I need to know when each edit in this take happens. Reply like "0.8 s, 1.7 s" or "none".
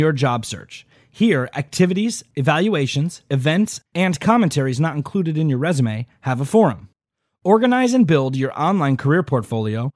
3.2 s